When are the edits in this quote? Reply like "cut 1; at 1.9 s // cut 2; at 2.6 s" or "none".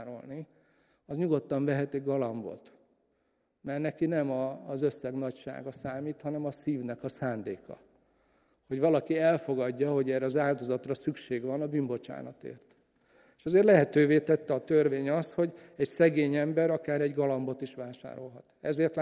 none